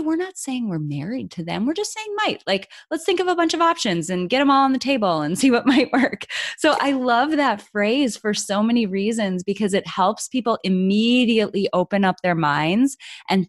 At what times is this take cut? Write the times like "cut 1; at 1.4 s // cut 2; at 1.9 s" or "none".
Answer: none